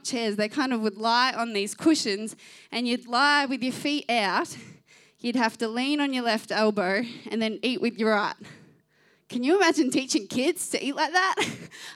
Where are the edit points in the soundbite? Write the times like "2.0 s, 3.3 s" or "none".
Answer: none